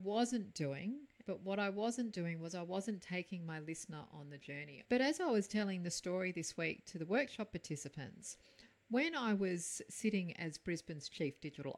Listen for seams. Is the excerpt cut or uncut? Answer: cut